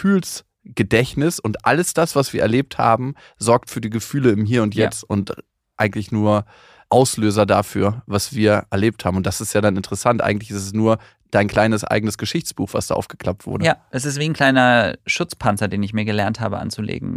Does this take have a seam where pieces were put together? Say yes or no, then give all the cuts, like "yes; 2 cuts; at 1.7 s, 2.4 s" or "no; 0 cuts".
no; 0 cuts